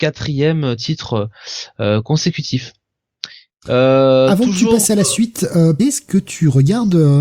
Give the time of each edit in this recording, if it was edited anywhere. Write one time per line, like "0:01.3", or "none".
0:03.5
0:05.8